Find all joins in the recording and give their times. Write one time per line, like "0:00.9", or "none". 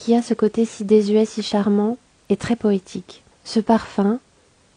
0:03.3